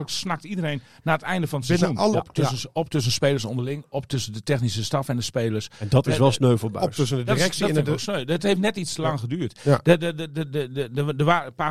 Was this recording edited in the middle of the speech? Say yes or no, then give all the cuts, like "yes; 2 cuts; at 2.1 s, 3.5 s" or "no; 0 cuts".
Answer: yes; 1 cut; at 2.1 s